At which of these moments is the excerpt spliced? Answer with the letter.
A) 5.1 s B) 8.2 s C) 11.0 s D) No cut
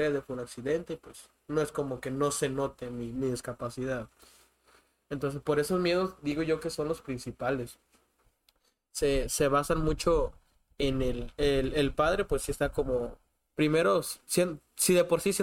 D